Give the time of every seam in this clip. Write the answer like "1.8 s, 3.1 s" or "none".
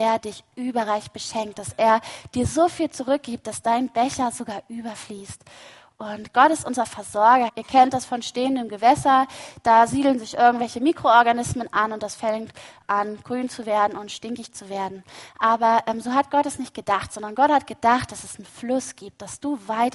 7.5 s